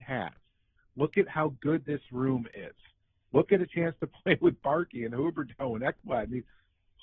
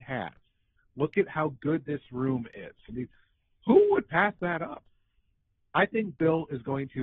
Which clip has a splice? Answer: second; 1 cut; at 2.9 s

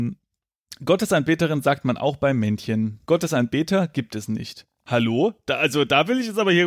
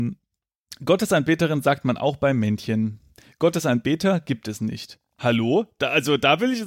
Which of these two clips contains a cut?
first; 1 cut; at 3.0 s

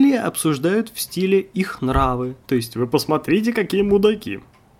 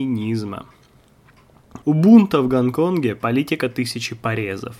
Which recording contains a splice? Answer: second; 1 cut; at 1.8 s

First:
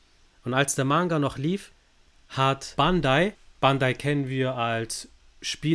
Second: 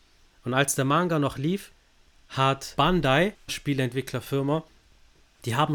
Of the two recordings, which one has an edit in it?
second; 1 cut; at 3.5 s

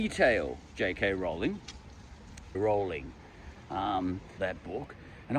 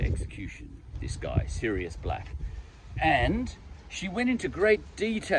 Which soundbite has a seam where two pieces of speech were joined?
first; 2 cuts; at 2.5 s, 4.4 s

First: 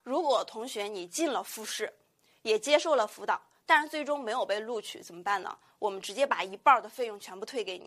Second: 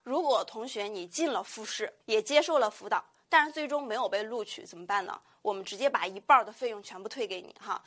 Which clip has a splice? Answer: second; 1 cut; at 2.0 s

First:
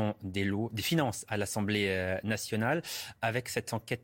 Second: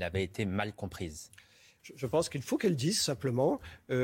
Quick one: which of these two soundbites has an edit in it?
second; 1 cut; at 1.8 s

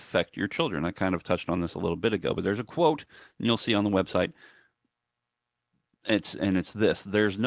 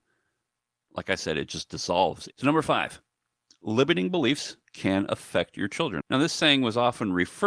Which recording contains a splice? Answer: second; 2 cuts; at 2.3 s, 6.0 s

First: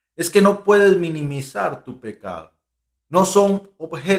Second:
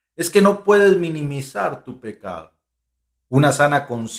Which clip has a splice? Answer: first; 1 cut; at 3.0 s

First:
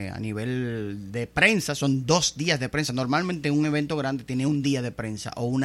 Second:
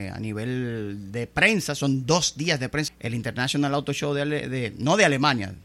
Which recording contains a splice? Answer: second; 1 cut; at 2.9 s

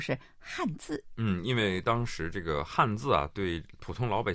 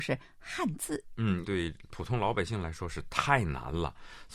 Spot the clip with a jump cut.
second; 1 cut; at 1.4 s

